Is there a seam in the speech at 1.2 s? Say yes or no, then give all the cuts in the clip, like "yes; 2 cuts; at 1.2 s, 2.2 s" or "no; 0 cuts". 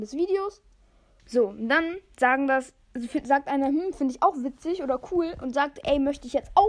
yes; 1 cut; at 1.2 s